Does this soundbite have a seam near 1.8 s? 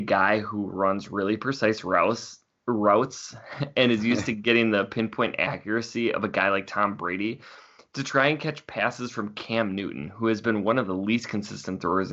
no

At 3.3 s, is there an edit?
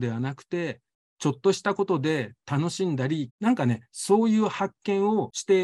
yes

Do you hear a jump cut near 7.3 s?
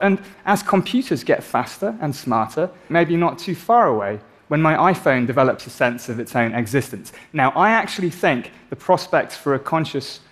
no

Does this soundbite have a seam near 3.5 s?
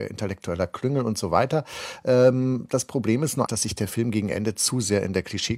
yes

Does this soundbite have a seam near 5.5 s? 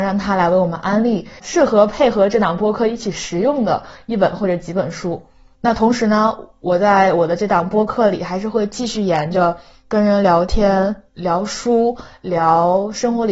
yes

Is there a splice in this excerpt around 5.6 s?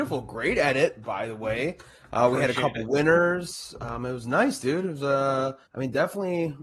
yes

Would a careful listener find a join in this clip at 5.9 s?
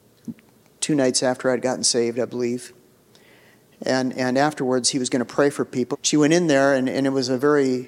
yes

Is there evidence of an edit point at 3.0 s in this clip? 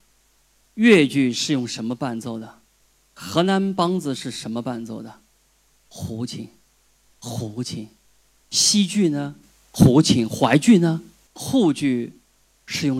yes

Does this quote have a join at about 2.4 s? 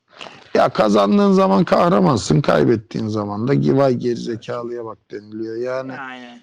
no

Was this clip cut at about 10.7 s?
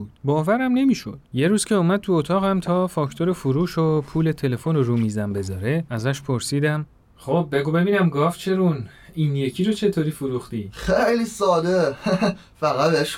no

